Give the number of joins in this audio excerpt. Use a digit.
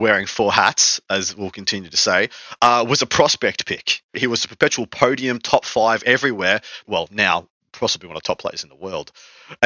2